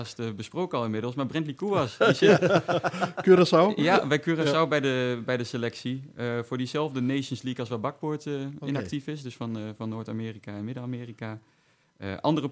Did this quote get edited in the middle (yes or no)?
no